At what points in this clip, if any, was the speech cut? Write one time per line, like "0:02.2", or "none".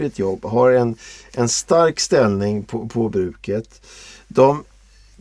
none